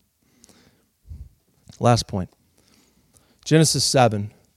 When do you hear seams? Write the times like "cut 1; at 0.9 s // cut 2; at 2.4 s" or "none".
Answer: cut 1; at 1.6 s